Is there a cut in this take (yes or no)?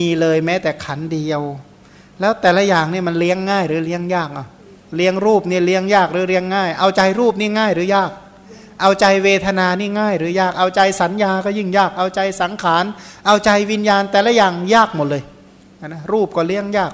no